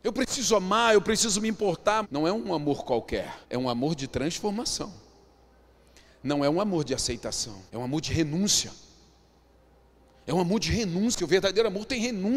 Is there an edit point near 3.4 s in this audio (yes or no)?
yes